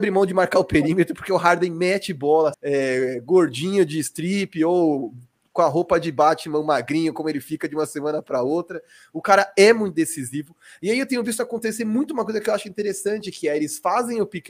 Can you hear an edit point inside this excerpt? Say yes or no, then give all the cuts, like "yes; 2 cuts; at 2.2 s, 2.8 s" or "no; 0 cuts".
yes; 1 cut; at 2.5 s